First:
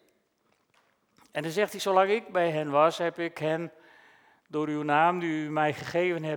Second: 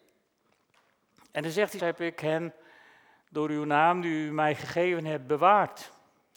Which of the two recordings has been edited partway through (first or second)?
second